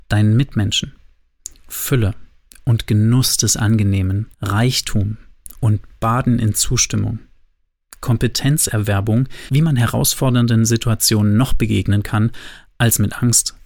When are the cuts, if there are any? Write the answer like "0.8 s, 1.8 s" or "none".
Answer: 4.3 s